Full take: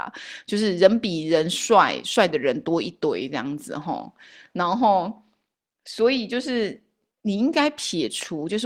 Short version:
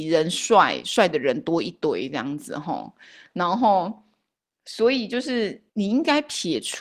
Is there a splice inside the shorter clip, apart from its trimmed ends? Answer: yes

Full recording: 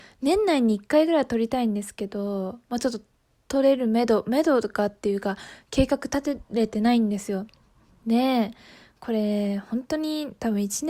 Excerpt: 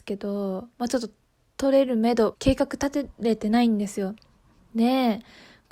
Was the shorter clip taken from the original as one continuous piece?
no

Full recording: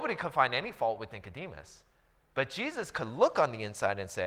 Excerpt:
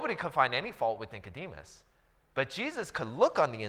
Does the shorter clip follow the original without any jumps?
yes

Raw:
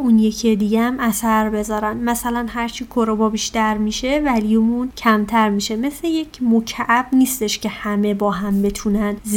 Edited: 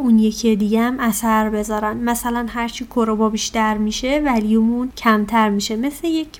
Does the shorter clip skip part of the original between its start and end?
no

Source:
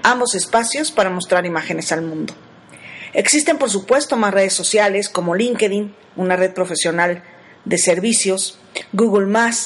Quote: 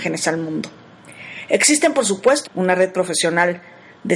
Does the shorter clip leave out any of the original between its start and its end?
yes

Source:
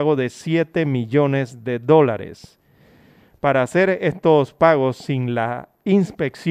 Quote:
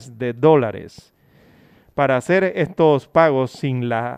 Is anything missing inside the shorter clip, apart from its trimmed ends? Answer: no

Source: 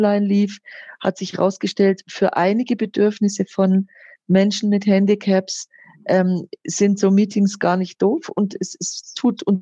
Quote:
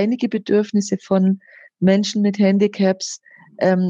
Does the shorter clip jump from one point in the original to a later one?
no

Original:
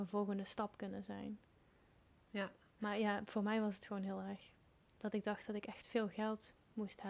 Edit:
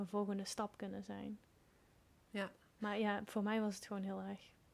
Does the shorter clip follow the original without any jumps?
yes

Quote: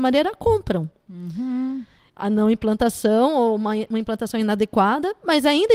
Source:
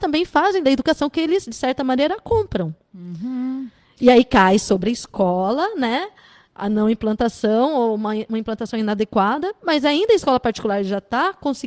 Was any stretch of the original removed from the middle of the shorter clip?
yes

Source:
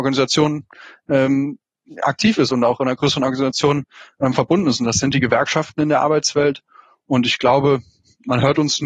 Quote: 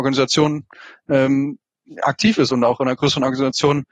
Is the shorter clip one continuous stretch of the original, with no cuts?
yes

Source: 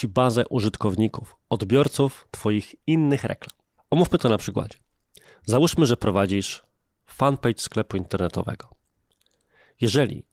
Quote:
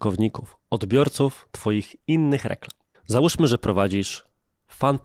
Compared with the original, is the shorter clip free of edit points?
no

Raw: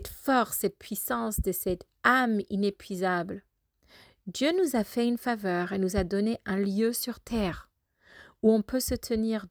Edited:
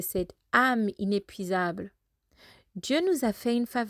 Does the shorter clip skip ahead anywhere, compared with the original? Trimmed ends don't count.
no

